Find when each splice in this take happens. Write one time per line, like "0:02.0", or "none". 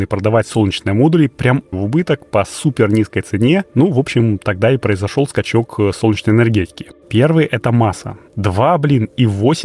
0:01.7
0:07.0
0:08.3